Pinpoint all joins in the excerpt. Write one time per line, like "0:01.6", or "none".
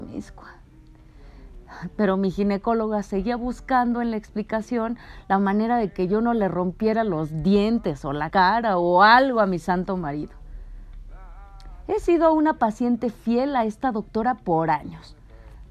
0:08.3